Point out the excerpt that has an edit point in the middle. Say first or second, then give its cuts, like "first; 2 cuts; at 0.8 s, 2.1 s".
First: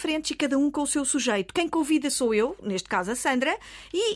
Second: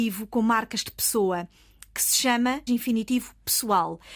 second; 1 cut; at 2.7 s